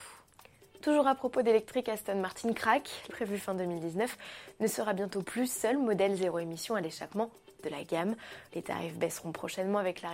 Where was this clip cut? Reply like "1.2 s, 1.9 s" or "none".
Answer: 3.1 s, 8.5 s